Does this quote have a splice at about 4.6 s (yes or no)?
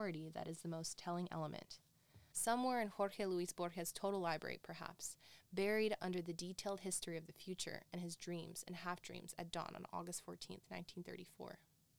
no